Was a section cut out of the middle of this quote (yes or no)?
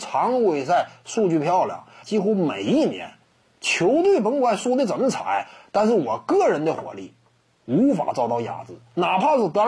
yes